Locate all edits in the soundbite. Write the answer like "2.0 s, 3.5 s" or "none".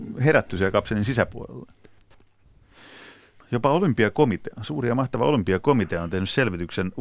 2.0 s, 3.4 s